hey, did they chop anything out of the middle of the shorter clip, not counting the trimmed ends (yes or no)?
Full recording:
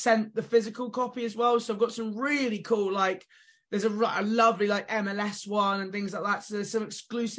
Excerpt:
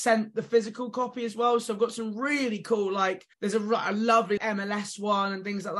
yes